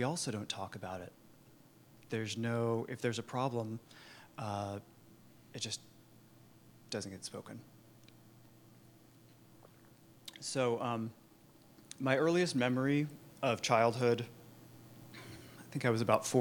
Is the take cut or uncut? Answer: uncut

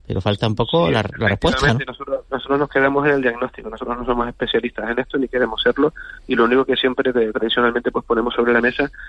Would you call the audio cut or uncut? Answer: uncut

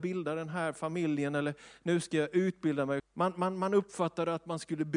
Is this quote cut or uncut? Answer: cut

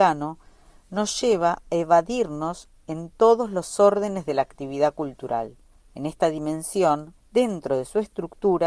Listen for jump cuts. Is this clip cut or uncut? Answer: cut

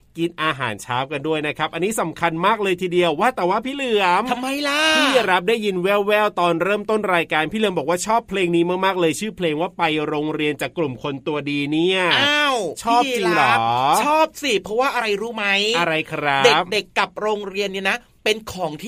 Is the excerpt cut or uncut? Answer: uncut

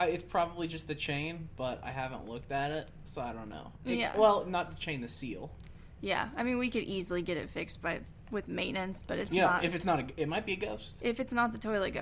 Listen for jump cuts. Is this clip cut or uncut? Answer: uncut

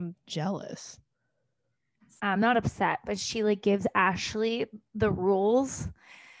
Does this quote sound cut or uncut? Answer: cut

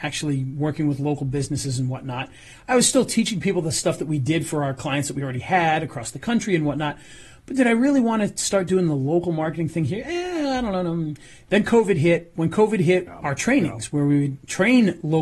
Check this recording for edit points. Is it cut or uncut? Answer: cut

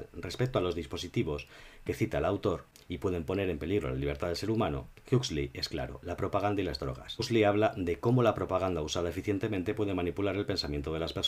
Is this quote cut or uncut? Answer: uncut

